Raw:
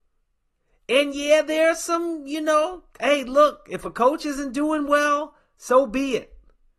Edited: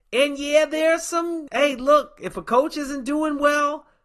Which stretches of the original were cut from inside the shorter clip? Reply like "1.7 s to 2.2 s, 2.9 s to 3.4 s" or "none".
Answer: 2.2 s to 3.0 s